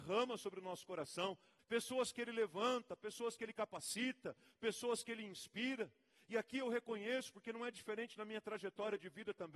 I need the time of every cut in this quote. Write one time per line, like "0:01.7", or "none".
0:01.6